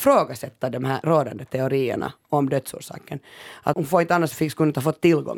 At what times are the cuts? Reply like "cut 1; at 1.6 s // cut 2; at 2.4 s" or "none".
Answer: cut 1; at 3.7 s